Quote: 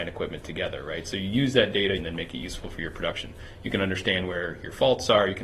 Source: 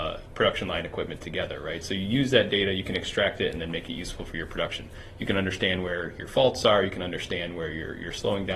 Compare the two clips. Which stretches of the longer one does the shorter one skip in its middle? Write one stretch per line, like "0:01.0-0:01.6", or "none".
0:02.7-0:03.5